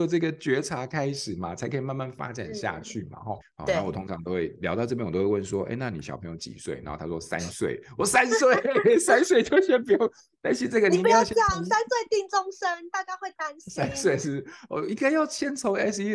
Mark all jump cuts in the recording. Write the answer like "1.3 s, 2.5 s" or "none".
3.4 s